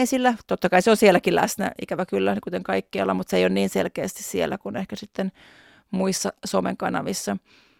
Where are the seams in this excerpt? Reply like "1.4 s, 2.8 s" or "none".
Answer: none